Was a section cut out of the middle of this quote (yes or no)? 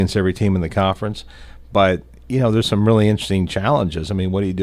no